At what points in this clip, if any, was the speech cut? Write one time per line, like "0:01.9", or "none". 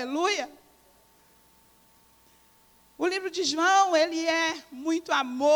none